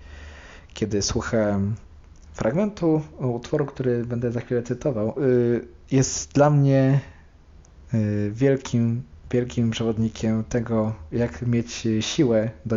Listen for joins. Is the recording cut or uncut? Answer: cut